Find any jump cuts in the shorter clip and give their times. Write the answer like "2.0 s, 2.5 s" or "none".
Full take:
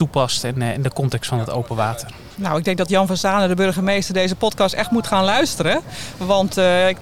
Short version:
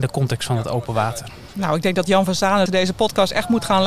2.7 s